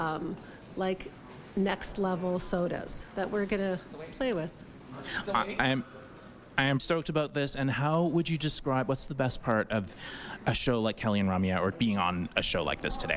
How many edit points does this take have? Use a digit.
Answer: 3